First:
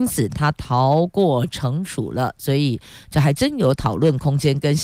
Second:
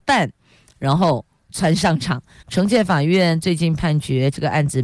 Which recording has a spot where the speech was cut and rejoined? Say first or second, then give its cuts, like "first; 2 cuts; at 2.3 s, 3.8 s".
second; 1 cut; at 2.4 s